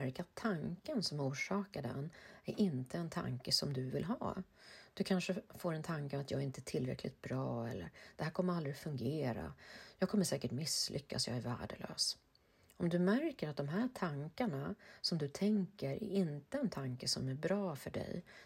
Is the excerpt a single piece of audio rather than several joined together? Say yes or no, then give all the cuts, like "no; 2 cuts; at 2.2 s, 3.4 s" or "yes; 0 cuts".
yes; 0 cuts